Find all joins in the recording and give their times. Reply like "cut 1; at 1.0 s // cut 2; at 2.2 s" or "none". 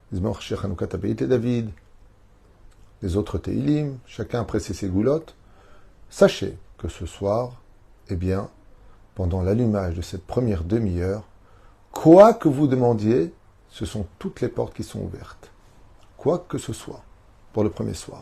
none

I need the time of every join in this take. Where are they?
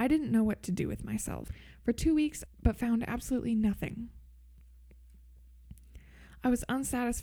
cut 1; at 2.5 s

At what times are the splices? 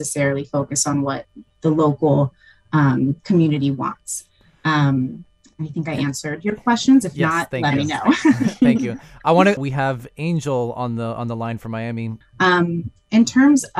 cut 1; at 9.6 s // cut 2; at 12.2 s

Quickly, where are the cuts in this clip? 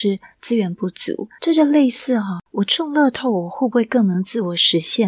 cut 1; at 1.4 s

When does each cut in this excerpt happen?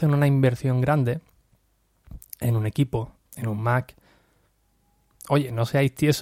cut 1; at 3.3 s

